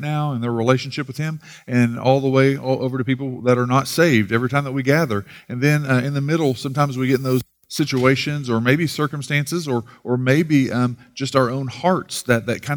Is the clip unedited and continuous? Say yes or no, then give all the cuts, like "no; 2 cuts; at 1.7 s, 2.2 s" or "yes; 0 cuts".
yes; 0 cuts